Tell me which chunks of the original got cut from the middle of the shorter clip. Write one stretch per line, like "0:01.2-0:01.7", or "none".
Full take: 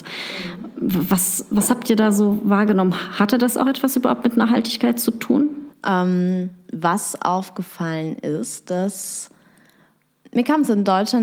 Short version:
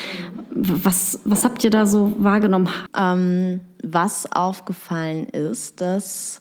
0:03.1-0:05.8